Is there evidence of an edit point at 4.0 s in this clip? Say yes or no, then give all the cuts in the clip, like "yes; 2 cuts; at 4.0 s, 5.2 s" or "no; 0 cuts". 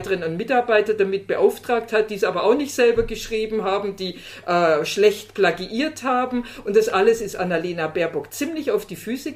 no; 0 cuts